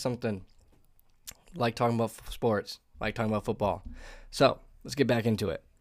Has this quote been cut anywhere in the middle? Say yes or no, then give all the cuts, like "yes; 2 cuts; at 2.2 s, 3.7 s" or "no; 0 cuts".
no; 0 cuts